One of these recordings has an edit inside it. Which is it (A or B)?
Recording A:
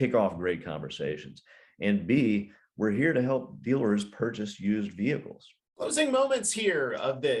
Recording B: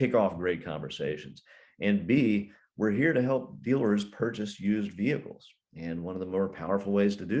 A